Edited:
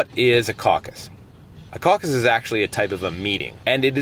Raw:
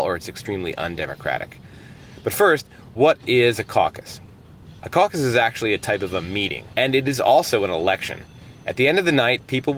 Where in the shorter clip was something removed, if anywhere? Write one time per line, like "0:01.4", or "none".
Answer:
none